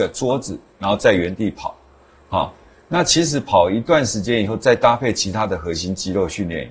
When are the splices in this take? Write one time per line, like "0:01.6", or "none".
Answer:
none